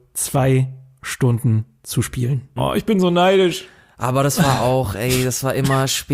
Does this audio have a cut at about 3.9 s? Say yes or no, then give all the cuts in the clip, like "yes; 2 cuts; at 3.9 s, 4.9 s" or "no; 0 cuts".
no; 1 cut; at 2.6 s